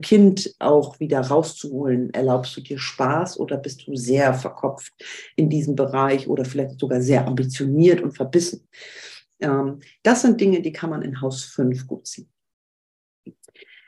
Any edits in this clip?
no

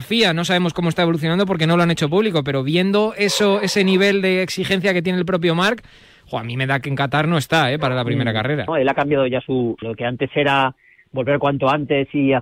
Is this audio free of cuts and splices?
no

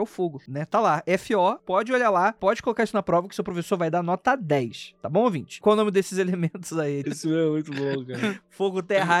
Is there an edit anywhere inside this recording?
yes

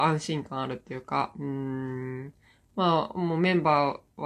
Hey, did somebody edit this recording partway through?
no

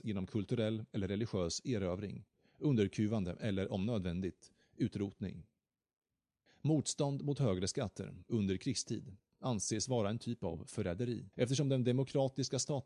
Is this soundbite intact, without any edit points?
no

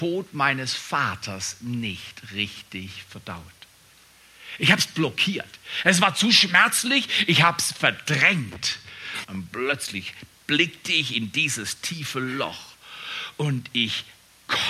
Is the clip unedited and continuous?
no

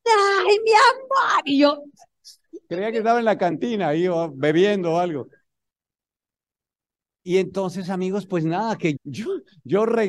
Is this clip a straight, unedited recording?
no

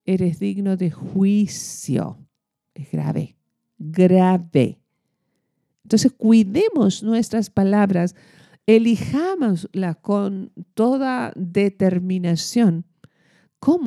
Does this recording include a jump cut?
no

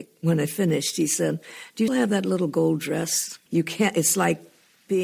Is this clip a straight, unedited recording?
no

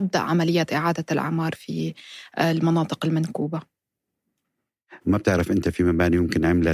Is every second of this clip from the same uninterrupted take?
no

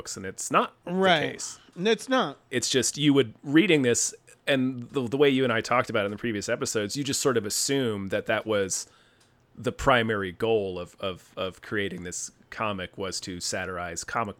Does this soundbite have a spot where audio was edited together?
yes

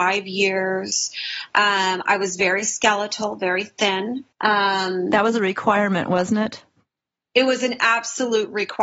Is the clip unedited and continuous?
no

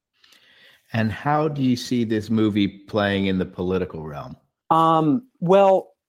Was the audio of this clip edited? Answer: yes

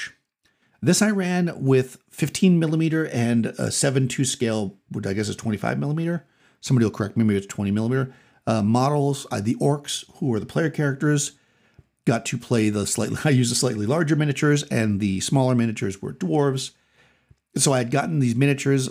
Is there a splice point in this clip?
no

